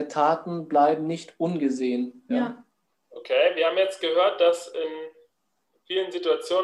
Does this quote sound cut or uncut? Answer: uncut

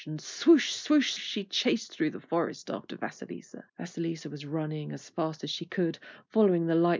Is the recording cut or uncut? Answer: cut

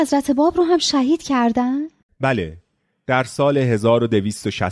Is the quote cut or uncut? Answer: uncut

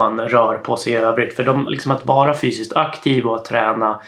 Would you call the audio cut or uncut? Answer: cut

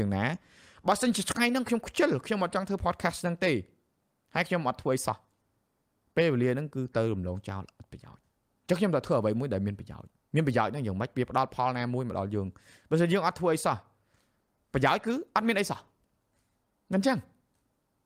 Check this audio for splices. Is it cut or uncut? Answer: uncut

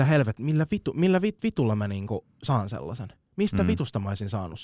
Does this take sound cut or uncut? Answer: uncut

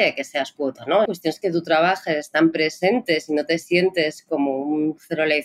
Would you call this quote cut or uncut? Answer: cut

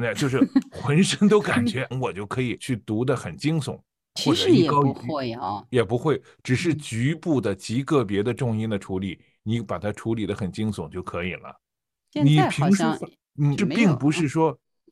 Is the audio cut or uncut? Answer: cut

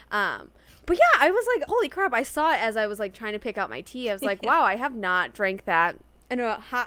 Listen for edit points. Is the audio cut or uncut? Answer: cut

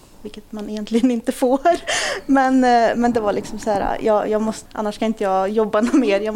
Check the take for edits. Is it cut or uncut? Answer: cut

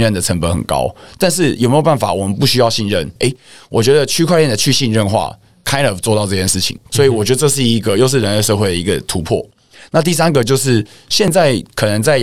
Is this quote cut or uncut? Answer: cut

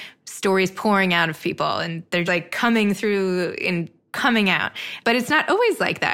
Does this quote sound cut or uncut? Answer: cut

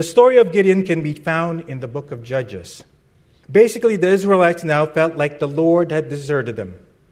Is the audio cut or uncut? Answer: cut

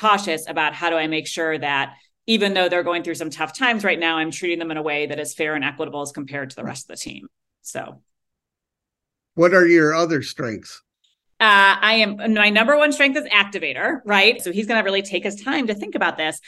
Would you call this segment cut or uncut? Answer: cut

